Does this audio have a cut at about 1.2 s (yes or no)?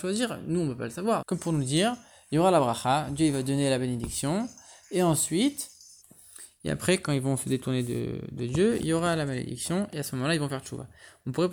yes